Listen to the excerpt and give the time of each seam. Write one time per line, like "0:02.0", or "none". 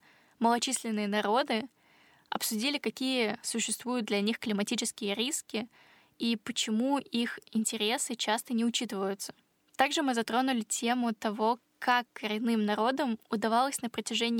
none

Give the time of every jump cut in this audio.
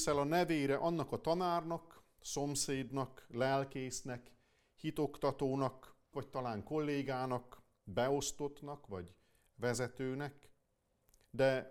0:06.1

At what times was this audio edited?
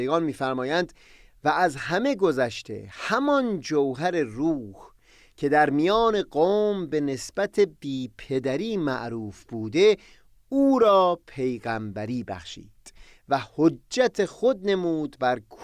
none

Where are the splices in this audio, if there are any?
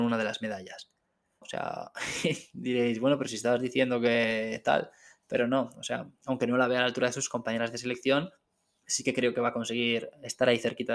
0:01.4

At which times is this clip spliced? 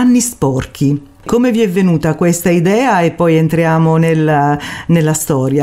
none

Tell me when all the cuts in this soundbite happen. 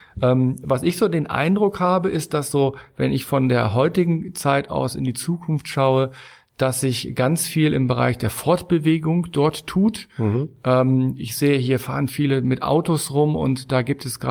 none

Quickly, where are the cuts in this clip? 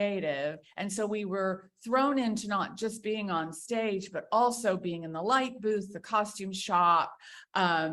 none

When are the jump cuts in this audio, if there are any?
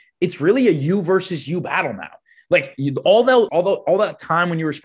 0:03.5

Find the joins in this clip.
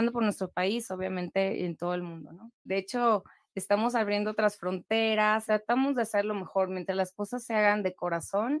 0:02.7
0:05.5

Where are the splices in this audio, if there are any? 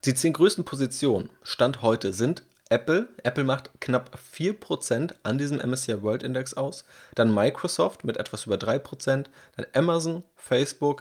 none

